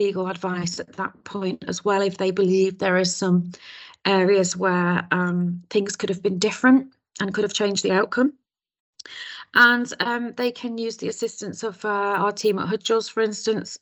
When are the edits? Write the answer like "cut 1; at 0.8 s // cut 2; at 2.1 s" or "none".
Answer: none